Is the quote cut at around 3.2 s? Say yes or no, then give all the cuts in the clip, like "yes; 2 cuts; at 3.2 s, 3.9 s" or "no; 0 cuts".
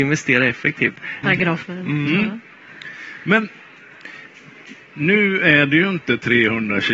no; 1 cut; at 1.2 s